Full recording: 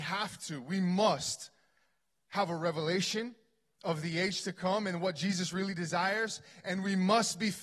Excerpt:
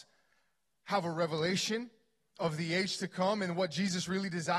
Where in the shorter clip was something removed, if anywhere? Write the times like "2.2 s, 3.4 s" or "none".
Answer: none

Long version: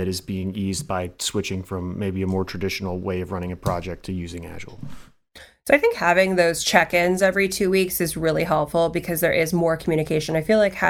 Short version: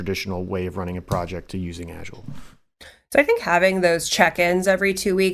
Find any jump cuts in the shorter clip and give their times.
none

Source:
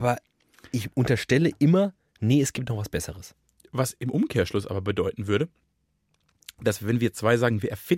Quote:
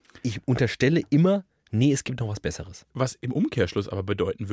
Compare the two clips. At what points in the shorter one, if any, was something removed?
2.9 s

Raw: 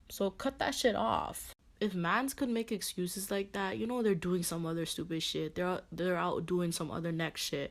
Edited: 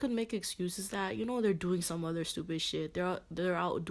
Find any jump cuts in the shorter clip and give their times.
0.9 s

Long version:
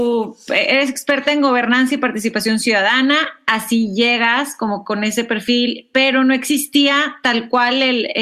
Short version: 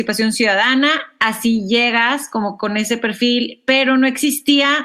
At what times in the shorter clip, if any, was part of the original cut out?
none

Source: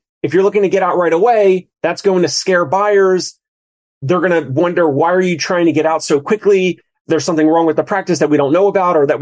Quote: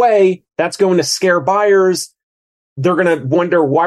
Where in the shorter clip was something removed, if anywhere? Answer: none

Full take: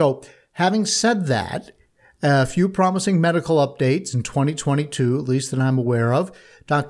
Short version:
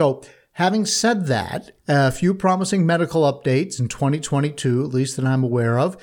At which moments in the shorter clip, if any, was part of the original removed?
1.8 s

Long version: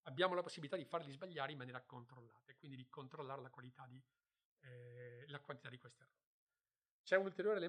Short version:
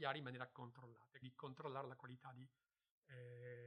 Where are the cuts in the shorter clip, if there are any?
1.2 s

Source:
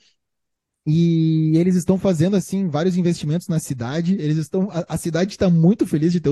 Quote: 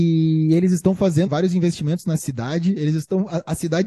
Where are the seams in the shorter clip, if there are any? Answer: 1.3 s

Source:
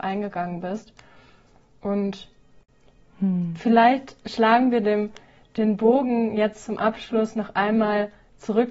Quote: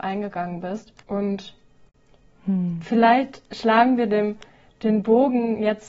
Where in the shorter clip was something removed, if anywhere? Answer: 1.0 s

